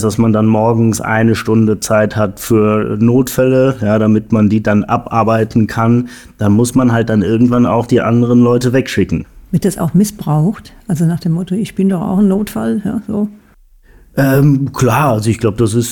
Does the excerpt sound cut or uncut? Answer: uncut